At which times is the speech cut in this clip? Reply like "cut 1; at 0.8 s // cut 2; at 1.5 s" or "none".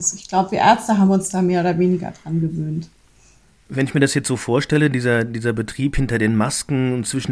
none